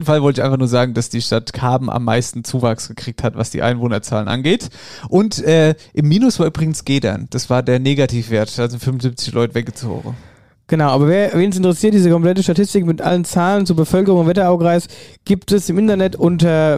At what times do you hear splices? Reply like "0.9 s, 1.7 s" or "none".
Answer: none

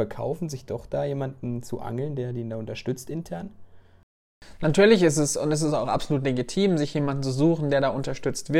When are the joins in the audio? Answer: none

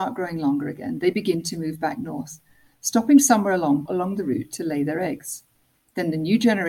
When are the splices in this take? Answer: 3.9 s

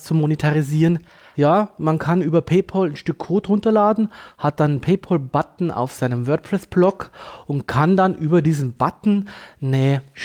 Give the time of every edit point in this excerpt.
1.3 s

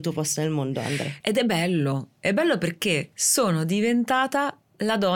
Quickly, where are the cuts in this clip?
1.2 s, 3.1 s

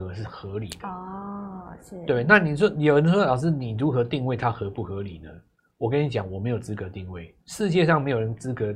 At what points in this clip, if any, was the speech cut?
7.4 s

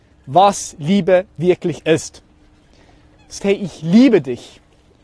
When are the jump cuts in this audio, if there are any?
3.4 s

